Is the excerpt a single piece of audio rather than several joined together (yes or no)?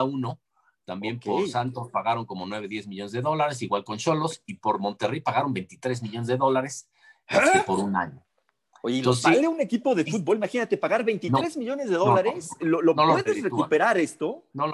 yes